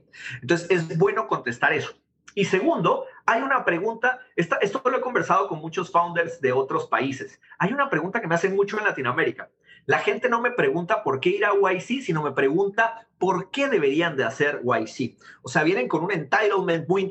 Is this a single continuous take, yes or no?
yes